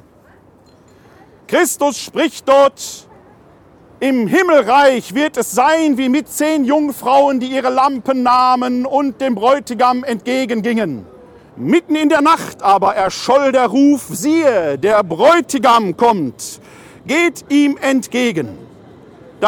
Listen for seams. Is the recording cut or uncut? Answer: cut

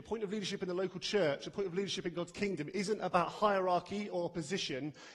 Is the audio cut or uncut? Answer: uncut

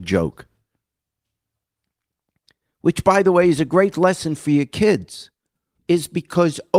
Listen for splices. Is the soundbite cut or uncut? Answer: cut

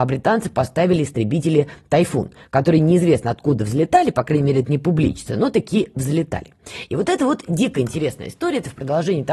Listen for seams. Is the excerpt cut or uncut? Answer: uncut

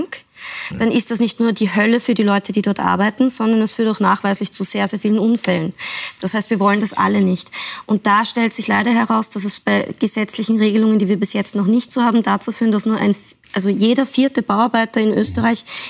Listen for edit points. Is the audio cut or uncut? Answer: uncut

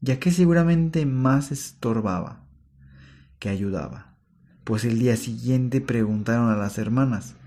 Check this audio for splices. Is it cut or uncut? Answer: uncut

